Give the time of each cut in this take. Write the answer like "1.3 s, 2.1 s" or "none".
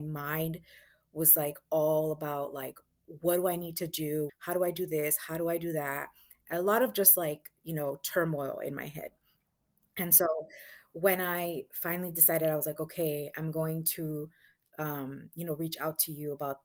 4.3 s